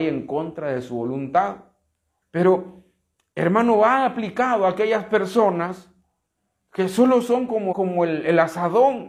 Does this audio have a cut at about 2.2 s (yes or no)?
yes